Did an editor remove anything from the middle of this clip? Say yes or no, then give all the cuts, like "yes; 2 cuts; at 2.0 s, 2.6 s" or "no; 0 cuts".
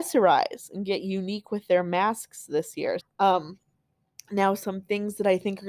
yes; 1 cut; at 3.0 s